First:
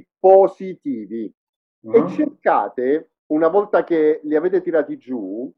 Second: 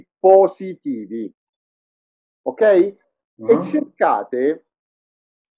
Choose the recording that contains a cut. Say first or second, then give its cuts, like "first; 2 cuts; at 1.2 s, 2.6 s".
first; 2 cuts; at 1.7 s, 3.2 s